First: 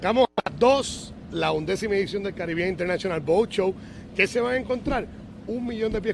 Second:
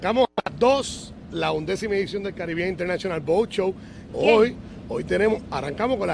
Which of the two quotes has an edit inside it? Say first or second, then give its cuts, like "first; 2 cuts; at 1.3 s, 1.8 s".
second; 1 cut; at 4.1 s